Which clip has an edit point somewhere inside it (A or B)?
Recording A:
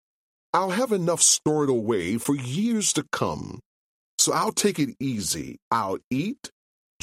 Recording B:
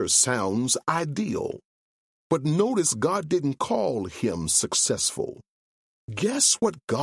A